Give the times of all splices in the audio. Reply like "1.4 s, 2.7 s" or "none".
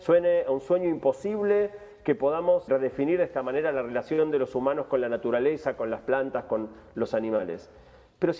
2.7 s